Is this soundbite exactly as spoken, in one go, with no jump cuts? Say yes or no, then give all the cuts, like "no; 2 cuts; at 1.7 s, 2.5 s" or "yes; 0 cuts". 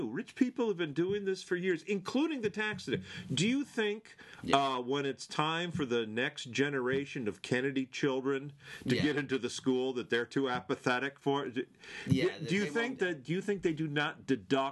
no; 1 cut; at 13.0 s